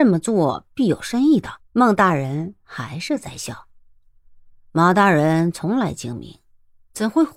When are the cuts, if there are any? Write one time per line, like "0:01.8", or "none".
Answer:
0:01.6